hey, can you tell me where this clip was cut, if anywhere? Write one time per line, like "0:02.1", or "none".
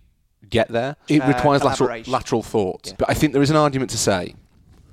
0:01.1
0:02.9